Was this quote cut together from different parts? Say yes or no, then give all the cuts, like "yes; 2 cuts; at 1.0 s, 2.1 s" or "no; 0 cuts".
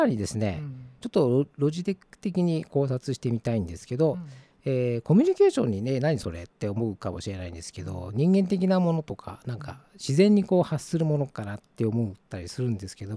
no; 0 cuts